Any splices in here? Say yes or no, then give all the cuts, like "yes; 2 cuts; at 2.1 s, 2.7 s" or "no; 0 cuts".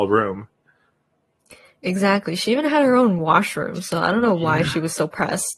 no; 0 cuts